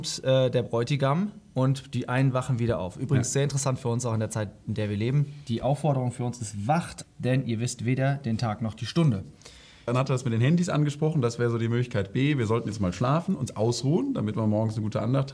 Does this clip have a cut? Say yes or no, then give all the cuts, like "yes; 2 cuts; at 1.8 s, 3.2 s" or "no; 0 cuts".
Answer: yes; 2 cuts; at 7.0 s, 9.9 s